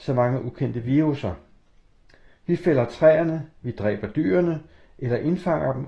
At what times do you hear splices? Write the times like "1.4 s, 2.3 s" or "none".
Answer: none